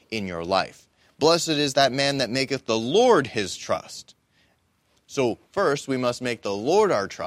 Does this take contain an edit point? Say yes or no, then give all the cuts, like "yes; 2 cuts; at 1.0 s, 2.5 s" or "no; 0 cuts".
no; 0 cuts